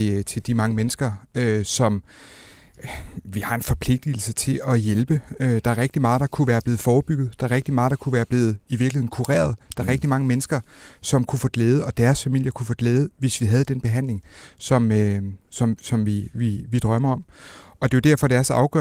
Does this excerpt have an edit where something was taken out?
no; 0 cuts

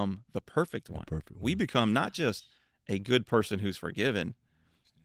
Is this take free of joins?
yes; 0 cuts

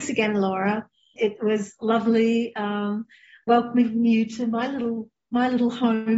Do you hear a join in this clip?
yes; 1 cut; at 1.2 s

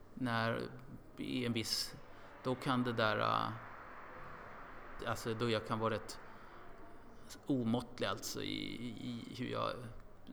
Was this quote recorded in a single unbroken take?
no; 1 cut; at 5.0 s

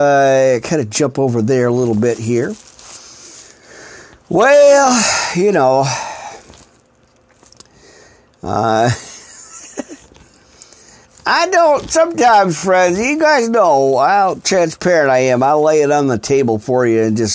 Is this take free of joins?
yes; 0 cuts

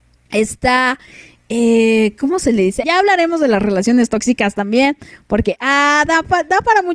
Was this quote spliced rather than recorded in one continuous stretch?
yes; 1 cut; at 2.8 s

